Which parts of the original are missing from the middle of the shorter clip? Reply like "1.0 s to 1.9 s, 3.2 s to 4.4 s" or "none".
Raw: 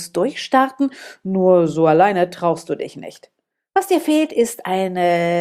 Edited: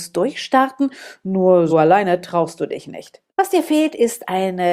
1.7 s to 1.8 s, 3.4 s to 3.7 s